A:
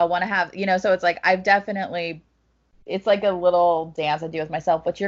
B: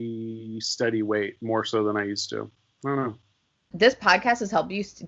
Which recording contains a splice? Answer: B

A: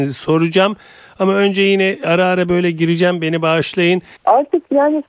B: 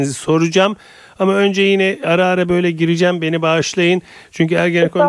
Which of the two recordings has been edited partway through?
A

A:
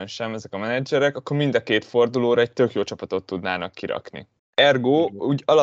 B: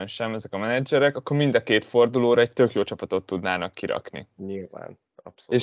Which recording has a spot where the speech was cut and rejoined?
B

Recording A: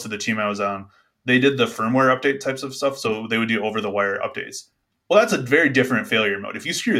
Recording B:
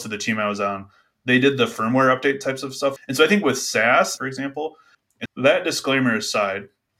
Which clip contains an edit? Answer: B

